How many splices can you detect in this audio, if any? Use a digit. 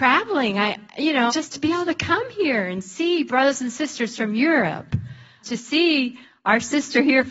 2